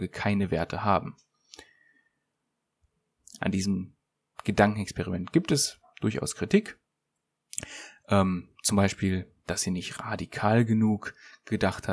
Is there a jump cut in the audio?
no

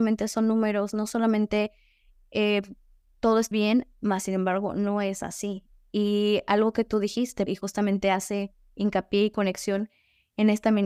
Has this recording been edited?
yes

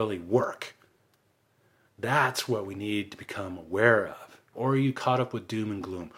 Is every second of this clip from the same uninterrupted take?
no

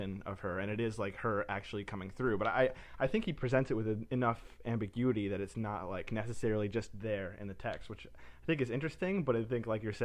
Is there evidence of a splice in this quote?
no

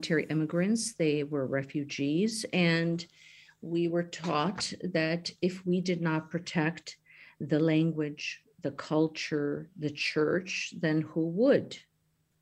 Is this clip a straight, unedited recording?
yes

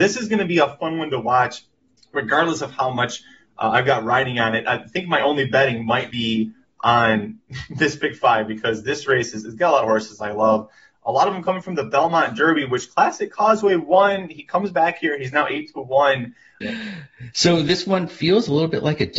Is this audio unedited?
no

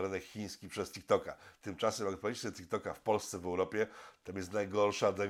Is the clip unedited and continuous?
yes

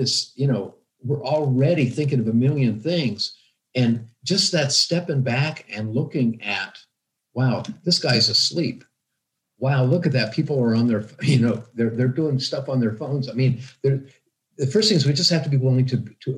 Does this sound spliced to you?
no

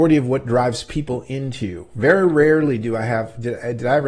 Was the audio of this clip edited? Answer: no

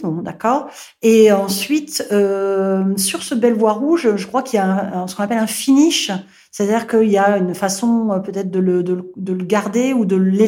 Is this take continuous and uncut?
yes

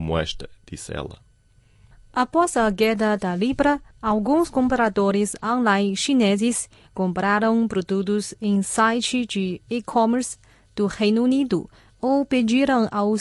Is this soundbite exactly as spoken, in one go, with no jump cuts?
yes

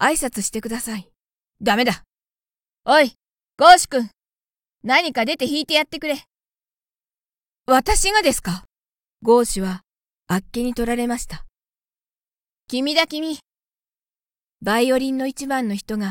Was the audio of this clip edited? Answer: no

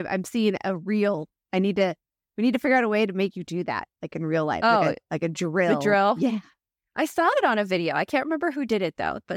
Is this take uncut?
yes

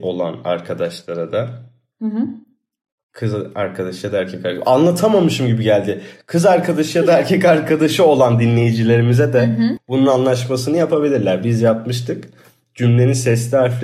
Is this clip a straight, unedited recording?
no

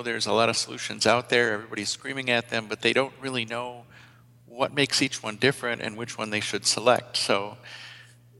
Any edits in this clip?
no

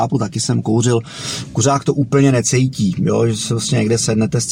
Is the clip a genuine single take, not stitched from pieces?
yes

